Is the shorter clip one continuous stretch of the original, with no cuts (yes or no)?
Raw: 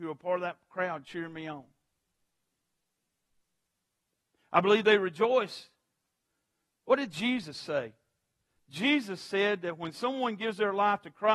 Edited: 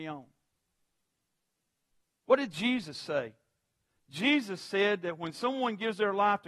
no